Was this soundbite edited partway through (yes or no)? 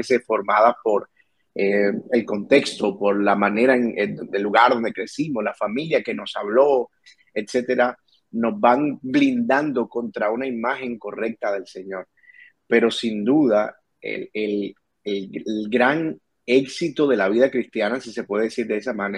no